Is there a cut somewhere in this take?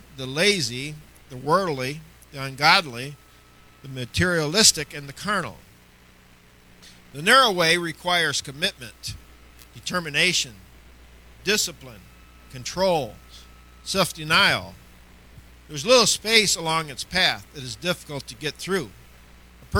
no; 0 cuts

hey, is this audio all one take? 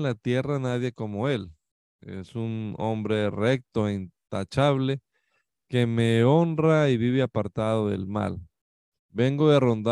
no; 1 cut; at 9.0 s

